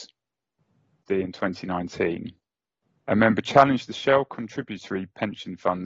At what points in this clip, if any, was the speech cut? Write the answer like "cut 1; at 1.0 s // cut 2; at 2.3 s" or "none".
cut 1; at 1.0 s